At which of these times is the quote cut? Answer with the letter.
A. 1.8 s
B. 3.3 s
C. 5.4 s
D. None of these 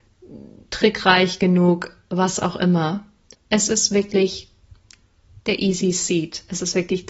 B